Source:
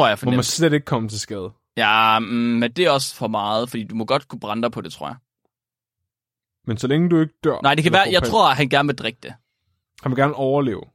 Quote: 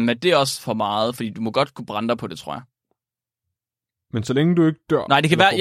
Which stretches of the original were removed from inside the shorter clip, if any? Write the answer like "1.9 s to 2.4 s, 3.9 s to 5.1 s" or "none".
none